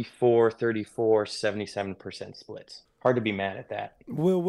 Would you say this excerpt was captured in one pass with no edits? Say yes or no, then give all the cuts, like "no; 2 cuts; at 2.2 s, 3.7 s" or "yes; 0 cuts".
no; 1 cut; at 2.9 s